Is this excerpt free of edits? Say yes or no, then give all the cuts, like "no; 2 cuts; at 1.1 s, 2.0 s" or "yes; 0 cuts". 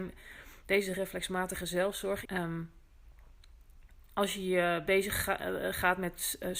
no; 1 cut; at 2.2 s